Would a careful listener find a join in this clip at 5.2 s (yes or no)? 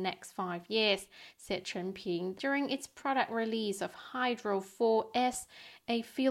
no